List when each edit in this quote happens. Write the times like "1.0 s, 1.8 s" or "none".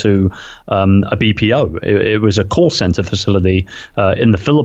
none